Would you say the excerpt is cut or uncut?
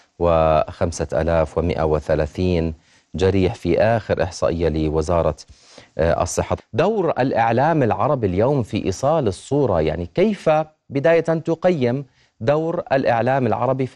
cut